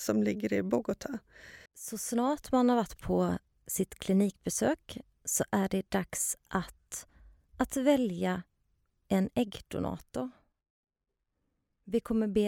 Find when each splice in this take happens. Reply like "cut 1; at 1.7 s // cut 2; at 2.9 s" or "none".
cut 1; at 1.7 s